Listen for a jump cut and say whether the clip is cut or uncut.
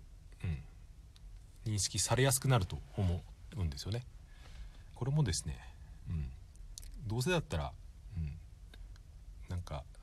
cut